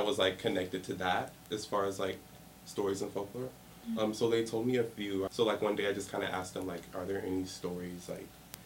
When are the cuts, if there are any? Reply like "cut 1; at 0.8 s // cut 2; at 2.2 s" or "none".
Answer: cut 1; at 5.3 s